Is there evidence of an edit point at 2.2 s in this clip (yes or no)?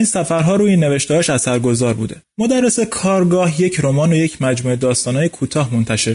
yes